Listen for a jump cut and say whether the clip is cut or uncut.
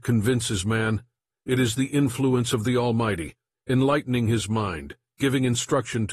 uncut